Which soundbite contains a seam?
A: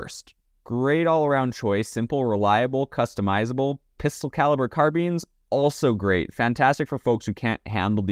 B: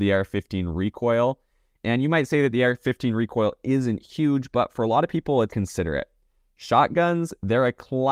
B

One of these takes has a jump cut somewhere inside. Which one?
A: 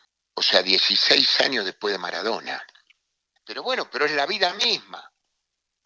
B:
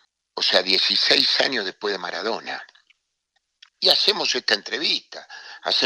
A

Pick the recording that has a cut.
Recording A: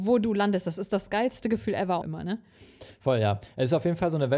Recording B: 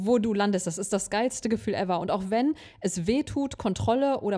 A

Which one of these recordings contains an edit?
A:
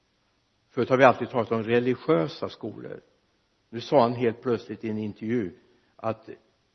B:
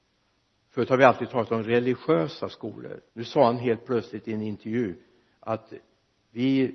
B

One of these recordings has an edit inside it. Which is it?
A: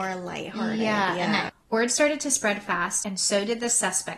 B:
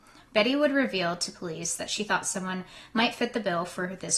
A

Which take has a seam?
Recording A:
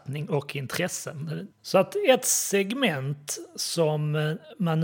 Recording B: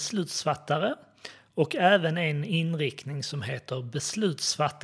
A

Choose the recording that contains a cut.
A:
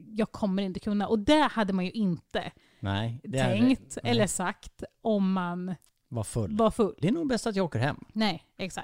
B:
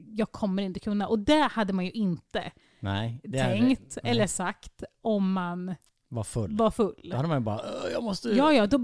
A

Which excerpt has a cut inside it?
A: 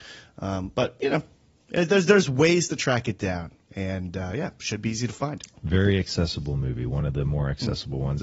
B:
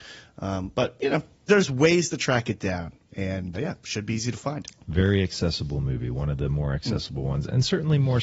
B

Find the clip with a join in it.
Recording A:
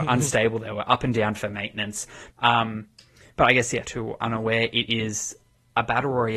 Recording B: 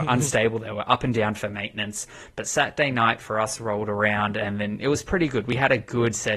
A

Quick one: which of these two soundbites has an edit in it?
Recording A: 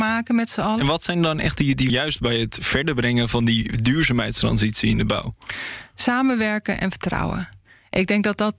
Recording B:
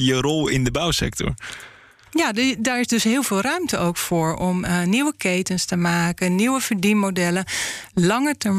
A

